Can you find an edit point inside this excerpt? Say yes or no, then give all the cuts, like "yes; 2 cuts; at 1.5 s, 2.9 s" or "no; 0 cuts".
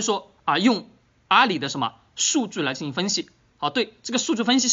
no; 0 cuts